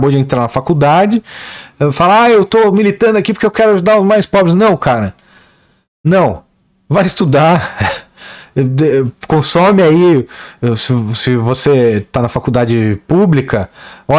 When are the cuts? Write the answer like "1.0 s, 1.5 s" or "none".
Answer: none